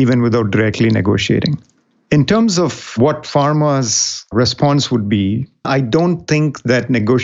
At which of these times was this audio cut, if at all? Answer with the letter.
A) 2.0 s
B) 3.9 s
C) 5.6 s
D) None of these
C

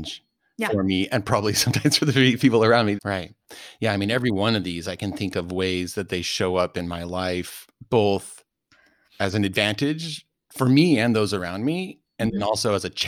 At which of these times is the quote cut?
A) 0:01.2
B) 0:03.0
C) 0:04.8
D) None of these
B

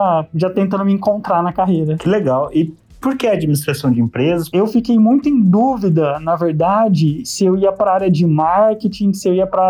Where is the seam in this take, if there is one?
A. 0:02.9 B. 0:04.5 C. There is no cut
B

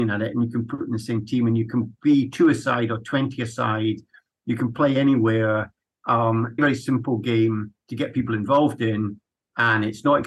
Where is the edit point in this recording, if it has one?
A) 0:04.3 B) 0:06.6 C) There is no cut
B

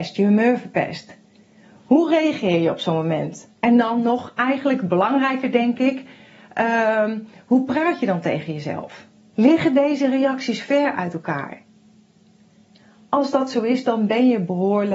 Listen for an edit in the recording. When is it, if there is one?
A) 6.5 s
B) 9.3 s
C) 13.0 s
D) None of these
B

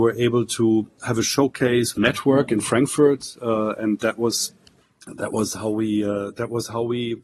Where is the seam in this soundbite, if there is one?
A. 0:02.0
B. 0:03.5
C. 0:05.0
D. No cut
A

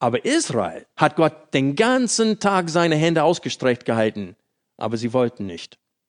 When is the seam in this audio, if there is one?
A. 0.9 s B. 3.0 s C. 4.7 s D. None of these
A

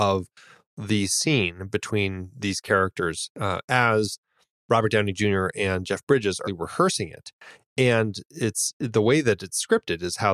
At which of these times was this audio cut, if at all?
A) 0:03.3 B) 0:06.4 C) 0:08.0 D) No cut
B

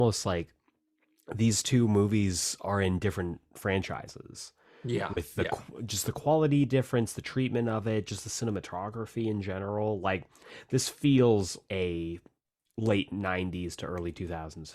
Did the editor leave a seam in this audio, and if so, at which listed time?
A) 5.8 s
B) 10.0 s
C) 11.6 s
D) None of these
C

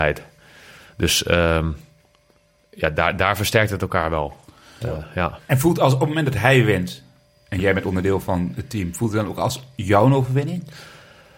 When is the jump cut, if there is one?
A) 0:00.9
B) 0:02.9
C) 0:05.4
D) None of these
D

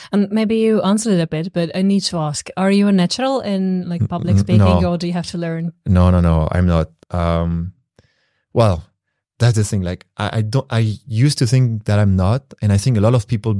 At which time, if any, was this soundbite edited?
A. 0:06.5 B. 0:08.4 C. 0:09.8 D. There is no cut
D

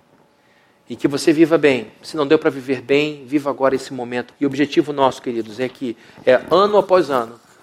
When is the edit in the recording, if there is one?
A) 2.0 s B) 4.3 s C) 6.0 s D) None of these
B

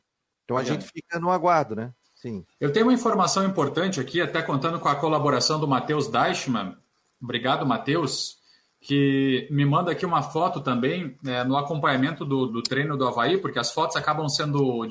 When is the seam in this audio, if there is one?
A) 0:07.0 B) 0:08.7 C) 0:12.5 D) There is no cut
C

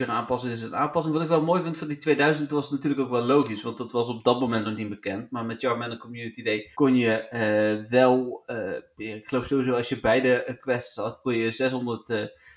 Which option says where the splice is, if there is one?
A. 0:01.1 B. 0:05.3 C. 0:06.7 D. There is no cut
C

